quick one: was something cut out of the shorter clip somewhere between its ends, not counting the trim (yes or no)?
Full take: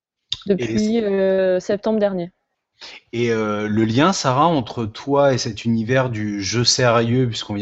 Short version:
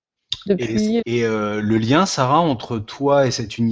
yes